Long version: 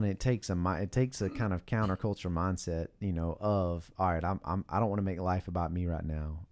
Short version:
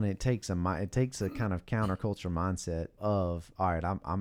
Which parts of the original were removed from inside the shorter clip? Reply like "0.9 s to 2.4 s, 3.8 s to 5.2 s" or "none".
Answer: 3.0 s to 3.4 s